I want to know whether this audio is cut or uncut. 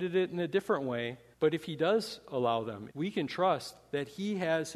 cut